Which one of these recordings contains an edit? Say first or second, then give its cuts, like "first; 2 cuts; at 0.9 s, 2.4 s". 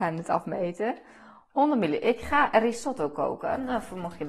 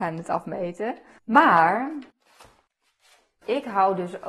second; 1 cut; at 1.2 s